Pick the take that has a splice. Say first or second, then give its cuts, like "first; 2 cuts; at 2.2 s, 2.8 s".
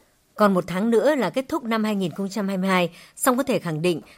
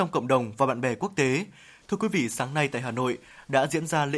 second; 1 cut; at 1.8 s